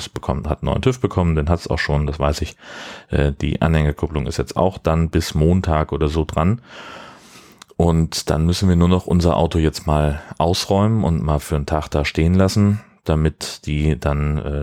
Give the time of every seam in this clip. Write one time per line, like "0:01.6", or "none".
none